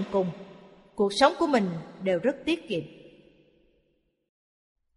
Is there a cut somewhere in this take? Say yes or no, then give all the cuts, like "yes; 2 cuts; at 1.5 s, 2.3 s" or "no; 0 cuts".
no; 0 cuts